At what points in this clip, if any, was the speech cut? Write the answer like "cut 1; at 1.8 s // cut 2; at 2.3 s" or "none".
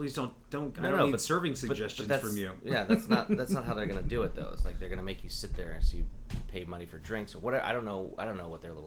none